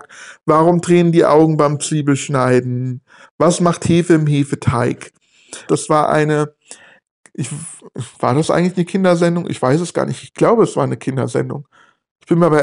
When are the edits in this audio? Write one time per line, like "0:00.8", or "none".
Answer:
0:03.2
0:05.7